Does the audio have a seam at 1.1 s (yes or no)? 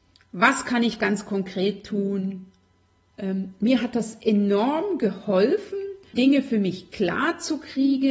no